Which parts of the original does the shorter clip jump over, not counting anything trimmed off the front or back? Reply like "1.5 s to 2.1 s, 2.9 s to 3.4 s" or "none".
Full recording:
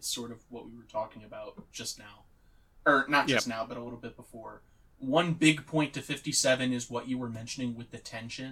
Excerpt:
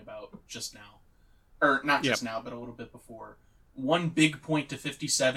none